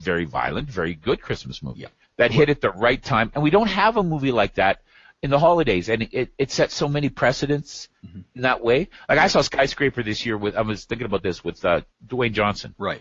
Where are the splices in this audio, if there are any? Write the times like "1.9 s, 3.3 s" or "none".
11.9 s